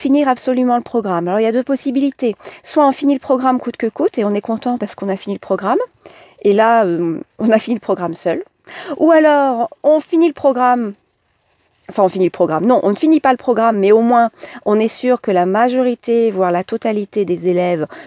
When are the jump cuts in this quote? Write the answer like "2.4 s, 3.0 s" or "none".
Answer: none